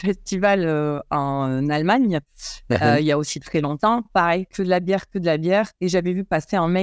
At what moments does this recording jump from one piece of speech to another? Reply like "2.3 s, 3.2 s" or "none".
none